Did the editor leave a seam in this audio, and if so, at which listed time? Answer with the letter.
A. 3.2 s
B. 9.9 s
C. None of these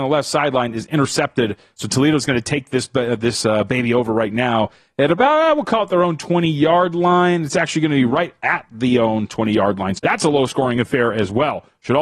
B